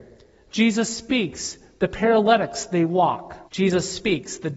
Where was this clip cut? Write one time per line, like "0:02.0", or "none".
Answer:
0:03.4